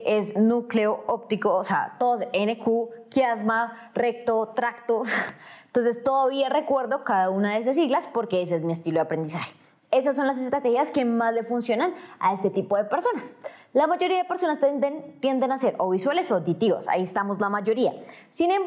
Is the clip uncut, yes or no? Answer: yes